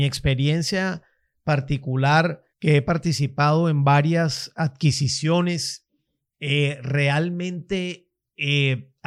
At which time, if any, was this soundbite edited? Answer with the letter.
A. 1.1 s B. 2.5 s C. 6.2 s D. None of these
B